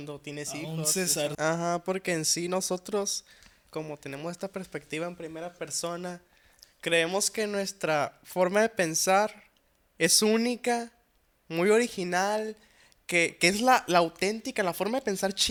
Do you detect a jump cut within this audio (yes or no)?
yes